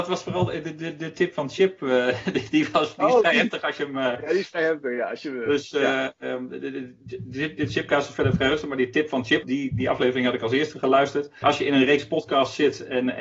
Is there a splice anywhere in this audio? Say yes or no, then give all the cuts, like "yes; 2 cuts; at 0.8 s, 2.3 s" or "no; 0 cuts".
yes; 2 cuts; at 9.4 s, 11.4 s